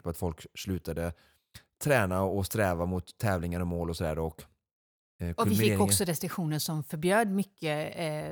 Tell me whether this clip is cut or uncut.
uncut